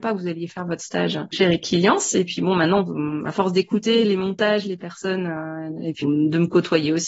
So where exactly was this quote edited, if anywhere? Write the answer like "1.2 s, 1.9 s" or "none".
6.0 s